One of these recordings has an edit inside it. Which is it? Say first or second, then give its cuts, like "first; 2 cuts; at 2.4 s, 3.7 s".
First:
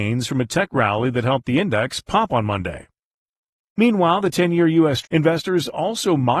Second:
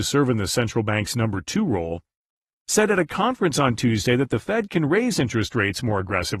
first; 1 cut; at 5.0 s